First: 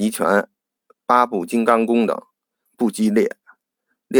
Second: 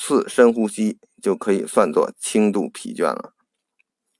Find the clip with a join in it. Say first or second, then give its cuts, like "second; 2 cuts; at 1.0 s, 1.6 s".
first; 1 cut; at 2.7 s